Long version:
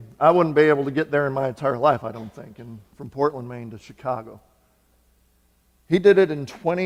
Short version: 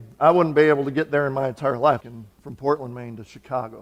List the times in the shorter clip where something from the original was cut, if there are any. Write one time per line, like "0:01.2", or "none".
0:02.0